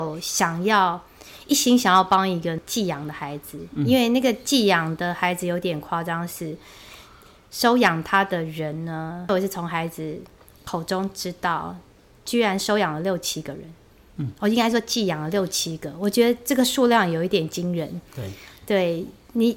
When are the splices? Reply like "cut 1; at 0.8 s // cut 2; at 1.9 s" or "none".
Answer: none